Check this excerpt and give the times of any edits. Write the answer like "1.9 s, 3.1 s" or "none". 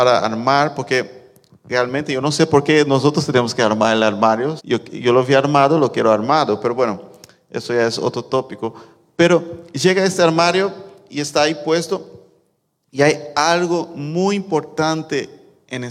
4.6 s